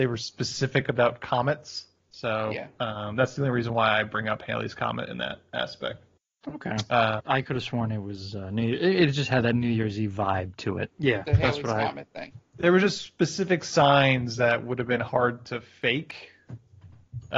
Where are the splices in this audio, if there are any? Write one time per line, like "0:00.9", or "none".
0:07.2
0:10.9

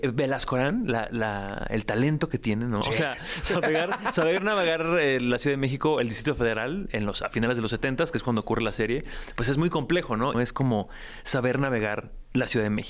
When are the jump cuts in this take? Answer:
0:02.8
0:10.3

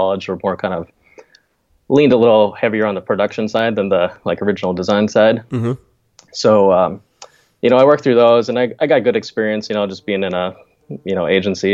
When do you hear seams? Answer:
none

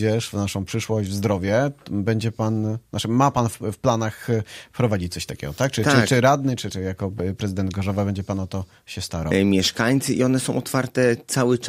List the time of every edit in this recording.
0:06.7
0:09.3

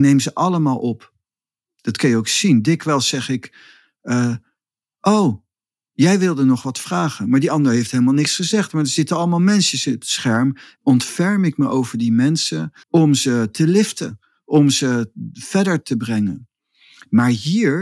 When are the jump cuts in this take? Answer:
0:10.8
0:12.8

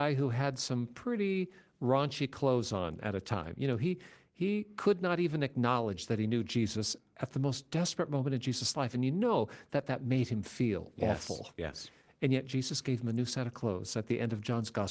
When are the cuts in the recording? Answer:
none

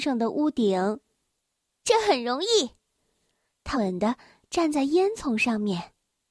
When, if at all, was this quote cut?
0:03.7

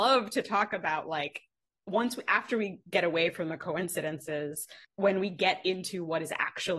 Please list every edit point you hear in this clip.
0:04.8

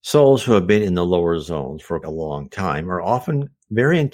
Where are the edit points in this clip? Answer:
0:02.0

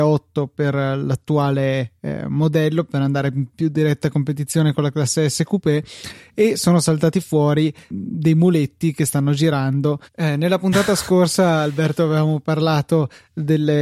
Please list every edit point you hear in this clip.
0:07.9
0:10.1

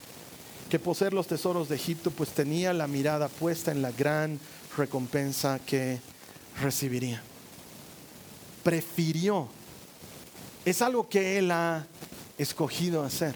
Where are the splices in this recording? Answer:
none

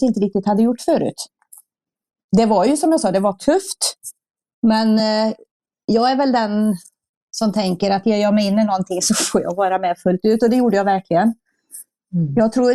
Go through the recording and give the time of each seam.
none

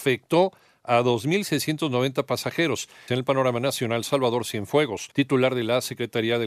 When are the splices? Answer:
0:03.1
0:05.1

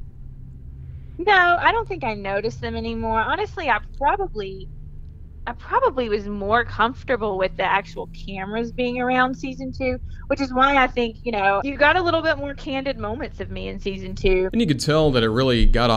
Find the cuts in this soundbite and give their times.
0:11.6
0:14.5

